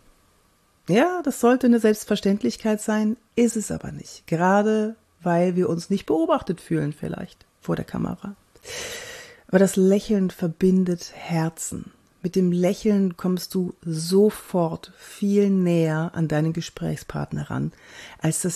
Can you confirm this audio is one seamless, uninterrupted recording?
yes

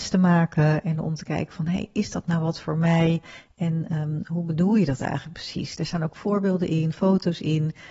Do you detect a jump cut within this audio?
no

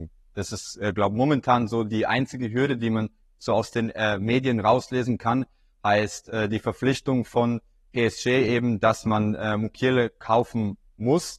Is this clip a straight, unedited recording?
yes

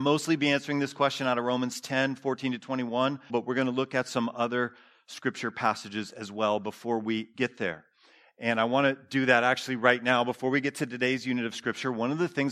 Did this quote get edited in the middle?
yes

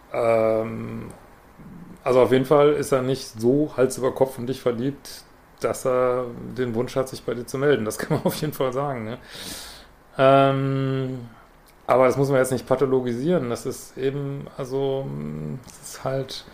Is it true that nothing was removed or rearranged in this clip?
yes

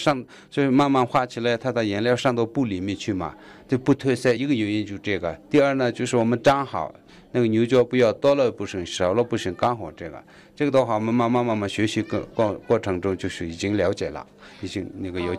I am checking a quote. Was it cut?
no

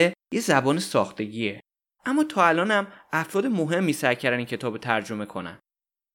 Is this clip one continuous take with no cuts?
no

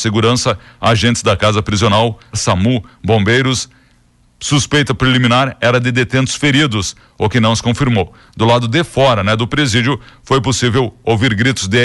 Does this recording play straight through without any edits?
no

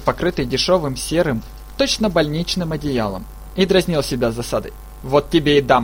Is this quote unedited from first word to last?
yes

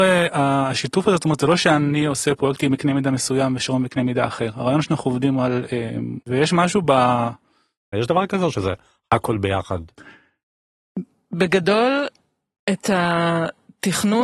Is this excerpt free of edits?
no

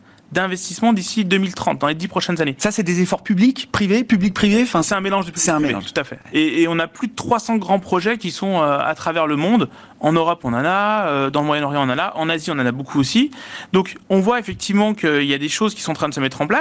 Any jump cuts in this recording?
no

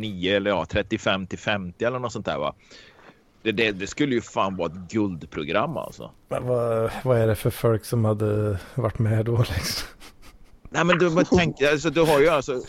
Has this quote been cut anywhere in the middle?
no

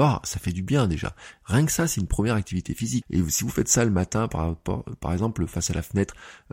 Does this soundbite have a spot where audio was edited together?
yes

